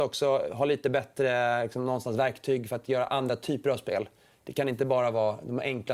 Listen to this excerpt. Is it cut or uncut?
uncut